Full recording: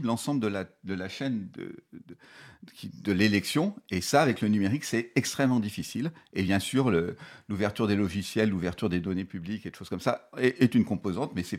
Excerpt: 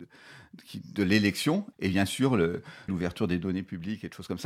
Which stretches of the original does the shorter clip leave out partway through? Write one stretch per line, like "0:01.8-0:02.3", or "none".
0:03.8-0:06.3
0:07.4-0:08.5